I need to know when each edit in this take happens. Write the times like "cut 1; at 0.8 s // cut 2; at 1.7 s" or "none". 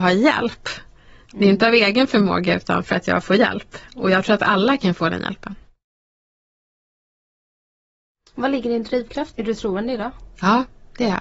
cut 1; at 9.3 s

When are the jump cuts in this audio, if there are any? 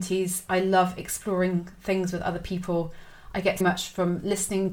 cut 1; at 3.6 s

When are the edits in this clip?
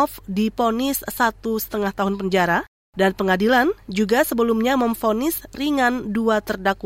none

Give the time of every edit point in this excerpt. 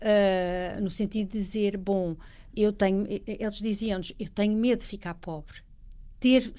cut 1; at 2.5 s

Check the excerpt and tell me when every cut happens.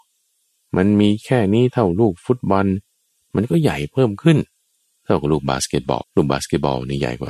cut 1; at 6.0 s

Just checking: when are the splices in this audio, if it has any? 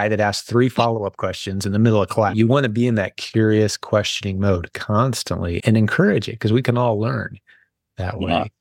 cut 1; at 2.3 s // cut 2; at 5.6 s

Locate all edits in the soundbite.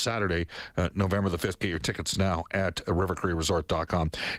none

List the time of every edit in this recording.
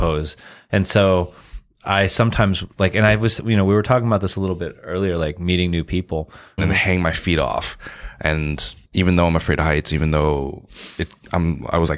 cut 1; at 6.6 s // cut 2; at 8.8 s

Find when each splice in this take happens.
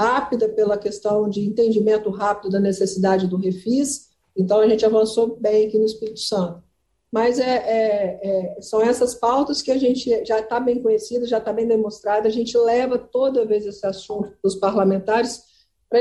none

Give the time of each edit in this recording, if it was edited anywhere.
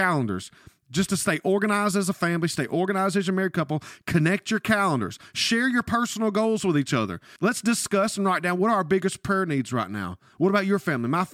cut 1; at 7.4 s

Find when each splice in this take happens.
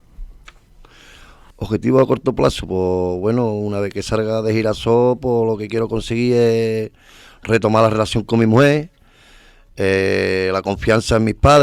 none

